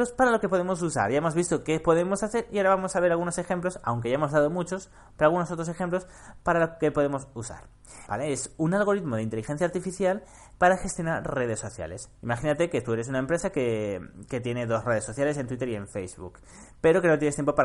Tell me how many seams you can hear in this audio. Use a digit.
1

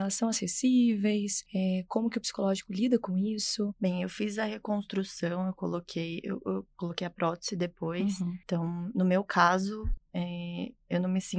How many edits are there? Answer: 1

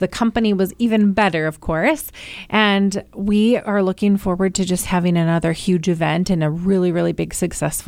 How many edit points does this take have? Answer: 0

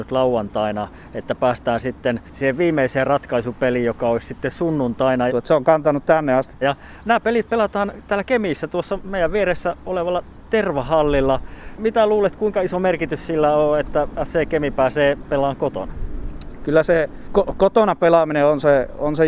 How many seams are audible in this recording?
2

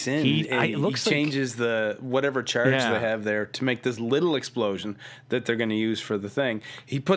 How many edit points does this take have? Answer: 0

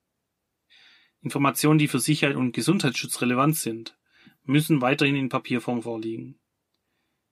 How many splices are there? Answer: 0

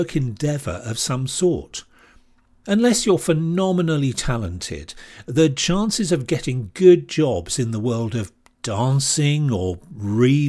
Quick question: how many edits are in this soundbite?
1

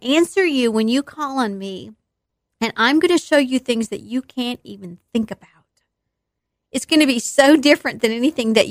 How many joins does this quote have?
0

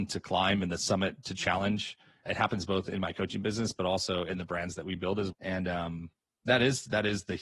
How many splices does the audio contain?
2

